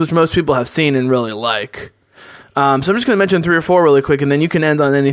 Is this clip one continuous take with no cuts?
yes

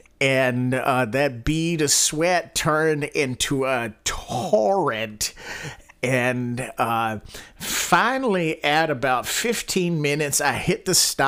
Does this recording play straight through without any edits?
yes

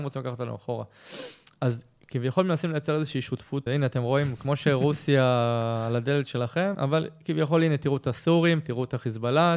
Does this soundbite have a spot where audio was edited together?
yes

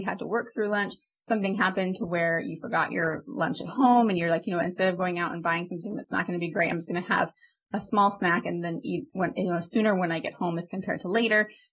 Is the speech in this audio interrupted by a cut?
no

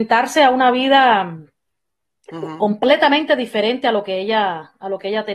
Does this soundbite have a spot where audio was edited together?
no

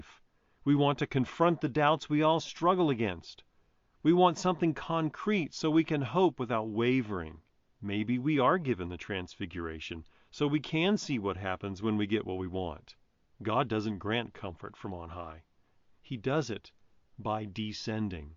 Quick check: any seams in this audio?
yes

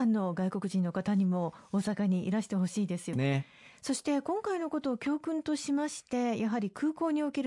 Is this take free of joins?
no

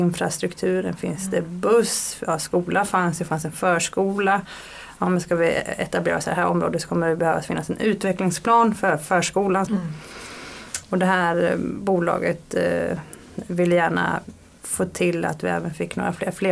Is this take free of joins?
no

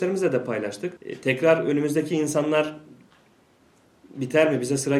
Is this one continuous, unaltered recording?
no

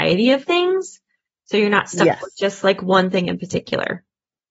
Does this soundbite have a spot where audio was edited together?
no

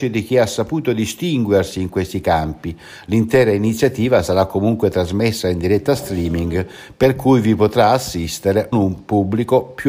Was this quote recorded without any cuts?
no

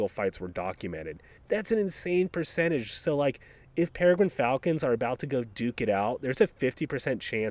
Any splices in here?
yes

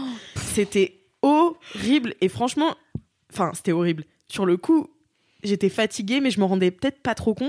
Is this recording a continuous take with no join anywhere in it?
yes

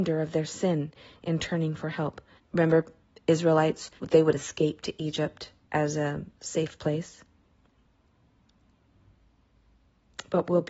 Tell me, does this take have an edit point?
yes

